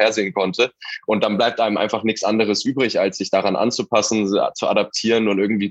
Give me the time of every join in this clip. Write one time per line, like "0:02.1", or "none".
none

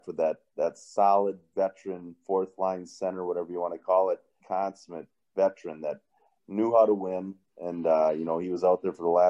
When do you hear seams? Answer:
0:04.4

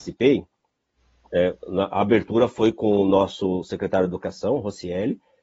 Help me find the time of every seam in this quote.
none

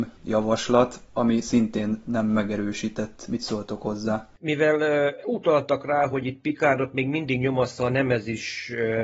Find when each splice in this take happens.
0:04.4

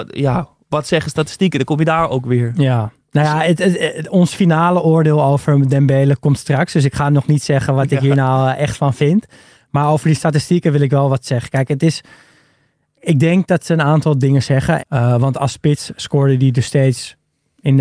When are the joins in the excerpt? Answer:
0:14.8

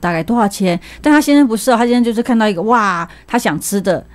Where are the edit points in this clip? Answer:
none

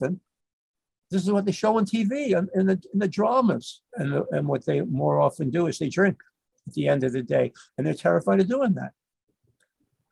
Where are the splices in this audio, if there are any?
0:03.9
0:07.7

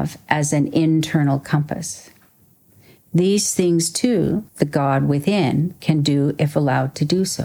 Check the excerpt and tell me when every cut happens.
0:03.0
0:04.5

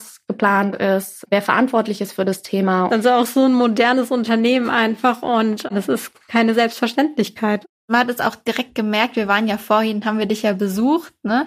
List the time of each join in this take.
0:02.9

